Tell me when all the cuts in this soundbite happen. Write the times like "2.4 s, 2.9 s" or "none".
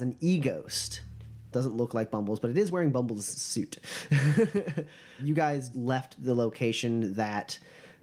1.5 s, 5.7 s